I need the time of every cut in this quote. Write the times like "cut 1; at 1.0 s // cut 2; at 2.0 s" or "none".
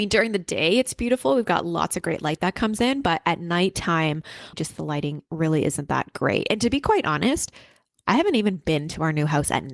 cut 1; at 4.5 s